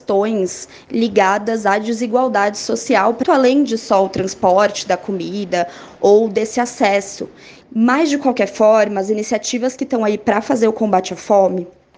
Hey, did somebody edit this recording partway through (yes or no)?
yes